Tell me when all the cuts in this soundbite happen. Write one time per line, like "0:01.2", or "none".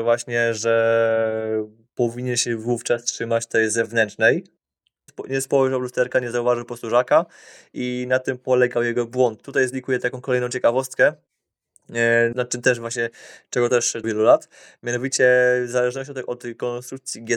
0:05.1
0:12.3
0:14.0